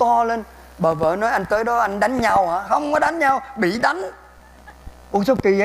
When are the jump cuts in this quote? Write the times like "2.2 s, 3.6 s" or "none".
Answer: none